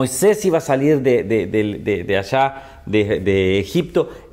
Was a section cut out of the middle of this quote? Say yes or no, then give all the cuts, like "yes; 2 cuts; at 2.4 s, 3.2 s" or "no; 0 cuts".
no; 0 cuts